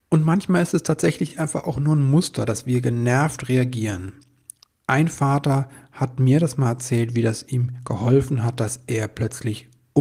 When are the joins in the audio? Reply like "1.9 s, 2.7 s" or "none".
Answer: none